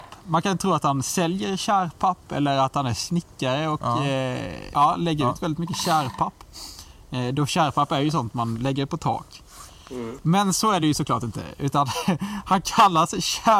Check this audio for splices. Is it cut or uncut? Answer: cut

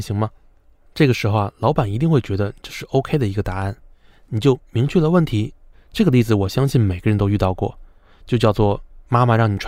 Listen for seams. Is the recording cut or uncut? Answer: cut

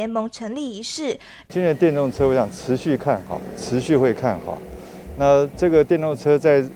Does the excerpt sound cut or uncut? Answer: cut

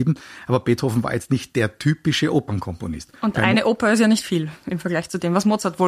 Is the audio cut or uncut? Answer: uncut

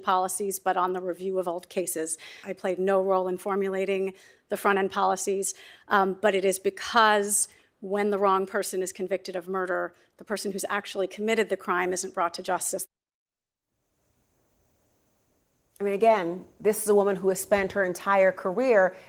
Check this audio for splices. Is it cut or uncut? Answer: cut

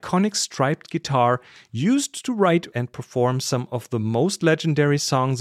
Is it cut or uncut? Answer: cut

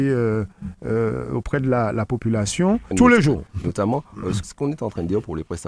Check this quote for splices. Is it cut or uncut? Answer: cut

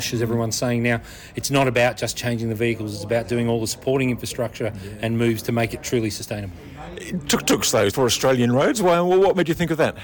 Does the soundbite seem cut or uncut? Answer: cut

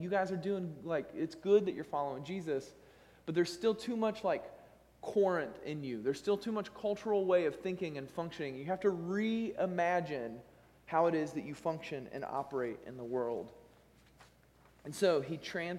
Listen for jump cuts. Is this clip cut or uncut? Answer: uncut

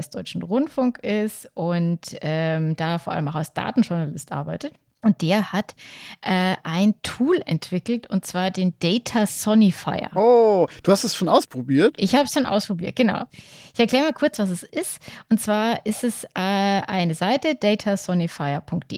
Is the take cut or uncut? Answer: uncut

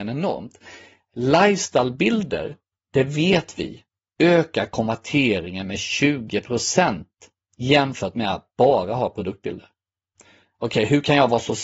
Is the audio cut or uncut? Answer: uncut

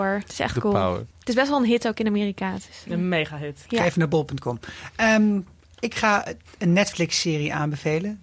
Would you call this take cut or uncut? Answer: cut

